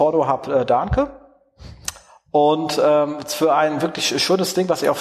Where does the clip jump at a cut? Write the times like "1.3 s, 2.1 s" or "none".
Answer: none